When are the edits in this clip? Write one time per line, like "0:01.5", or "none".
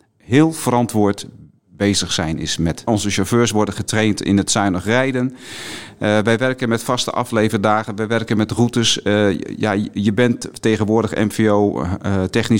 0:02.9